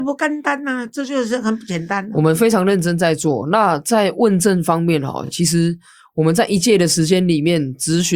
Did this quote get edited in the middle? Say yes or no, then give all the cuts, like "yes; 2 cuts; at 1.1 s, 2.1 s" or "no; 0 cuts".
no; 0 cuts